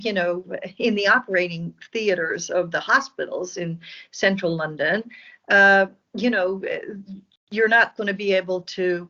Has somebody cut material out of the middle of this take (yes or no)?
no